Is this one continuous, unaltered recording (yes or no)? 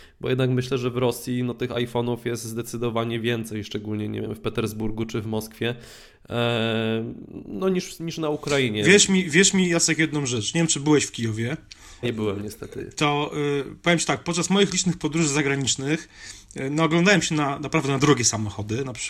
no